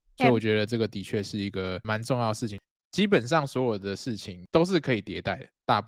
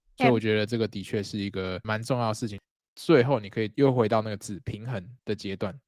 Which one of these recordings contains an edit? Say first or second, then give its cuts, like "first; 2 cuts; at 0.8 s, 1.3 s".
second; 1 cut; at 2.8 s